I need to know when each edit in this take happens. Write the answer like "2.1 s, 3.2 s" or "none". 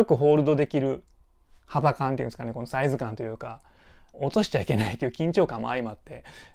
4.1 s